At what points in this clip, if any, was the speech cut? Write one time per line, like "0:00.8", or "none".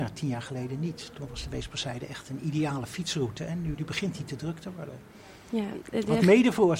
0:03.7

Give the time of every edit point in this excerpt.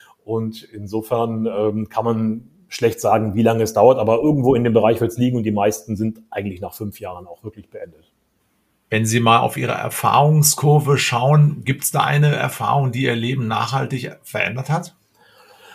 none

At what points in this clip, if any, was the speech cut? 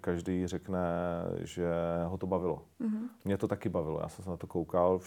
none

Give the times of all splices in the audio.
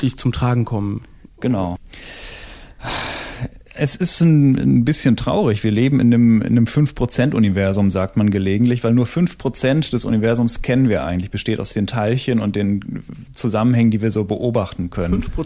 0:01.8

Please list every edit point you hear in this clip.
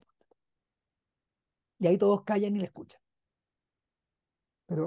none

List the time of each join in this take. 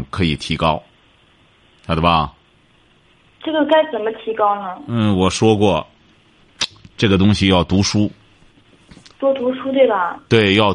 none

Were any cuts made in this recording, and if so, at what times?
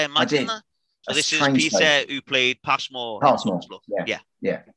0:01.0

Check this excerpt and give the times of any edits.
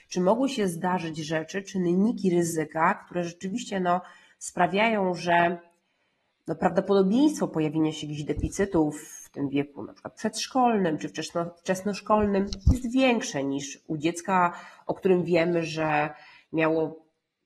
none

